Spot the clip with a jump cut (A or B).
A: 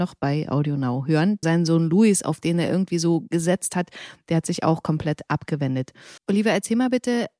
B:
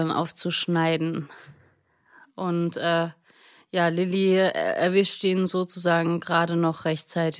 A